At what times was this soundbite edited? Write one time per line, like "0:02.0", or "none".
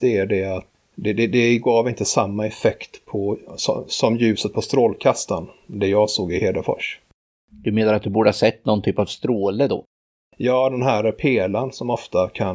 none